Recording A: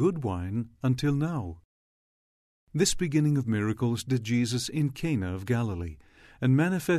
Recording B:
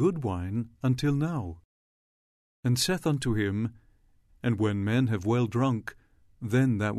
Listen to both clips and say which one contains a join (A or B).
B